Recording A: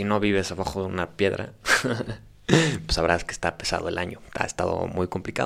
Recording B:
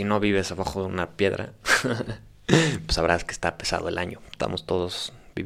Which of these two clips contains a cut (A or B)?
B